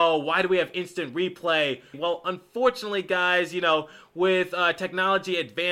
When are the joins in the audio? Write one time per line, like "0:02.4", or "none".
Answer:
0:01.9